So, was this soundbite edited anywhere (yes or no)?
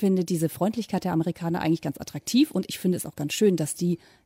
no